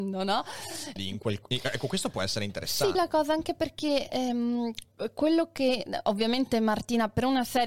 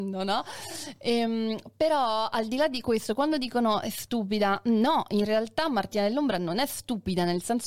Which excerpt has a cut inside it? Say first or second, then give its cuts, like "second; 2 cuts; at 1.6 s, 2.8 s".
first; 2 cuts; at 1.0 s, 2.9 s